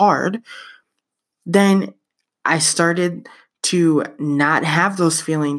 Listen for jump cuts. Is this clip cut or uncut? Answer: uncut